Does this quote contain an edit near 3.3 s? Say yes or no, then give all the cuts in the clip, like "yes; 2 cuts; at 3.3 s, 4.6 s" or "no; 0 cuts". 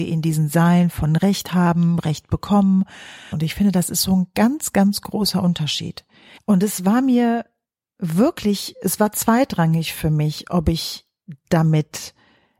yes; 2 cuts; at 3.3 s, 6.4 s